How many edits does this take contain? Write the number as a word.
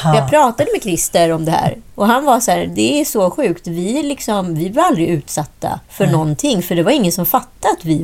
two